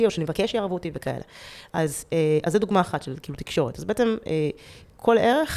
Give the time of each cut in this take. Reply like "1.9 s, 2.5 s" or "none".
none